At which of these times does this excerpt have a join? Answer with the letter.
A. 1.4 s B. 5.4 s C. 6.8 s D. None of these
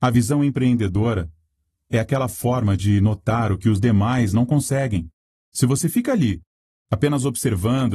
B